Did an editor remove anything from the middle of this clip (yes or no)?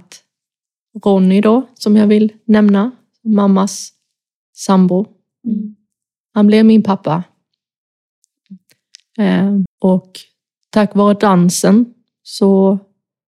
yes